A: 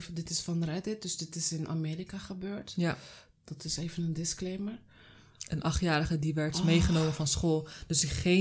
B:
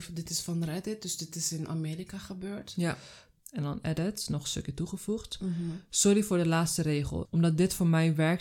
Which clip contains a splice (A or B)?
B